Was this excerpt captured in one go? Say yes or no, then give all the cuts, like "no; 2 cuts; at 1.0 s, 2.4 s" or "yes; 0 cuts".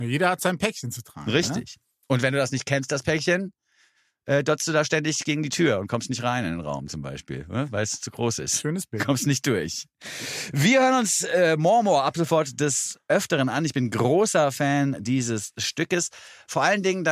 yes; 0 cuts